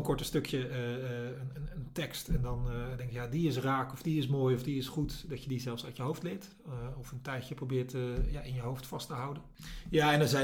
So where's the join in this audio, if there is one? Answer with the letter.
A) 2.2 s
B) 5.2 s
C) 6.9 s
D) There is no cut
D